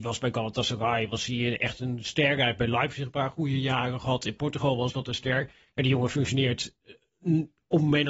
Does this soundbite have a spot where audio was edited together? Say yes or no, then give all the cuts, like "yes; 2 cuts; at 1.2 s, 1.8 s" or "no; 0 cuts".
no; 0 cuts